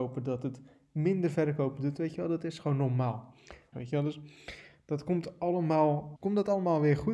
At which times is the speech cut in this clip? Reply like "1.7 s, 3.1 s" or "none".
3.7 s, 6.2 s